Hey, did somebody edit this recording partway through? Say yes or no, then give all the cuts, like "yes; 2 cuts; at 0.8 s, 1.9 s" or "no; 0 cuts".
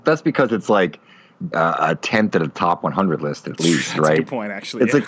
yes; 1 cut; at 1.5 s